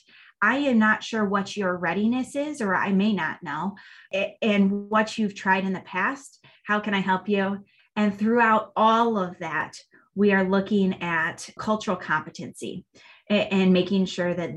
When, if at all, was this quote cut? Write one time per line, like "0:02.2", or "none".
0:06.6
0:07.8